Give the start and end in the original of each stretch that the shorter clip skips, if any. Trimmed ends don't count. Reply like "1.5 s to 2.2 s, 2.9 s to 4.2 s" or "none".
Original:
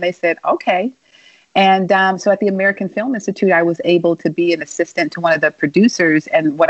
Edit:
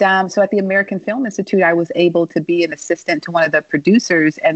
none